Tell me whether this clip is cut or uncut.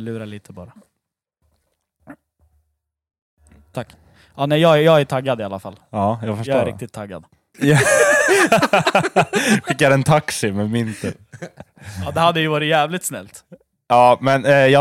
cut